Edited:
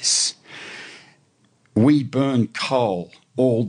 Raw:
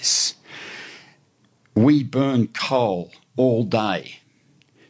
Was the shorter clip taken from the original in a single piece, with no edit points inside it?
yes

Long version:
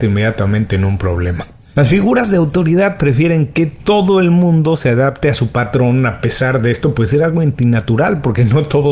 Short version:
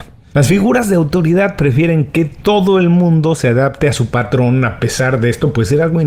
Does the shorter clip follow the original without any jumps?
yes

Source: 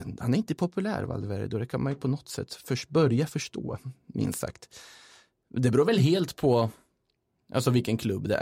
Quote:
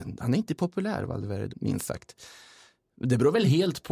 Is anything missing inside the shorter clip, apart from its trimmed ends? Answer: yes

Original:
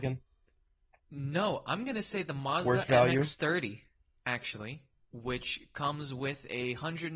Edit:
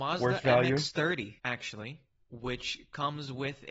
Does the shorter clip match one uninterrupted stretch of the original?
no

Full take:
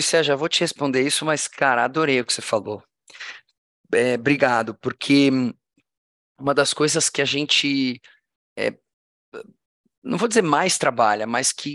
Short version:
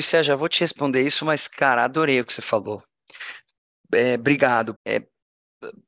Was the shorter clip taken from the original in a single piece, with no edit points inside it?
no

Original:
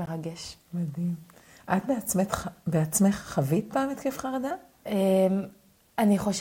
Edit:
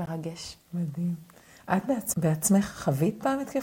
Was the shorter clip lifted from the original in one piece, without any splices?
no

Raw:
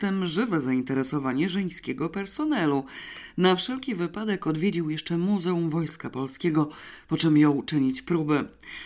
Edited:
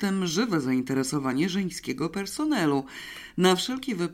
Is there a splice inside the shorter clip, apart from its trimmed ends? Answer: no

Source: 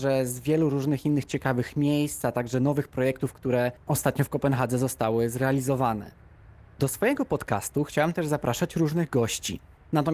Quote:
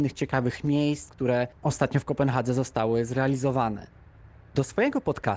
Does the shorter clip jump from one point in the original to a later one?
yes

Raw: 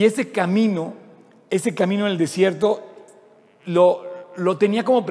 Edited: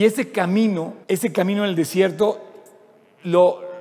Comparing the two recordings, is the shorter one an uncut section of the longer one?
no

